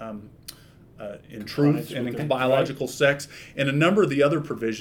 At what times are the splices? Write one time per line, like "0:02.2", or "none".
0:02.2